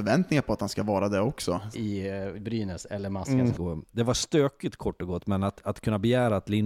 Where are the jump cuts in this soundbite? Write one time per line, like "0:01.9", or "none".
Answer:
0:01.7
0:03.5